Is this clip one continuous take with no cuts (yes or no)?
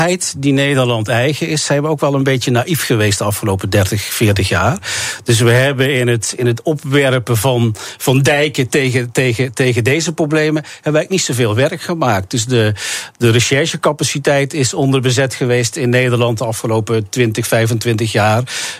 yes